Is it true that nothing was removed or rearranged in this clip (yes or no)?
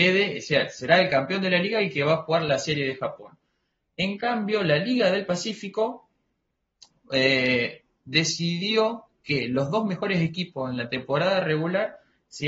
yes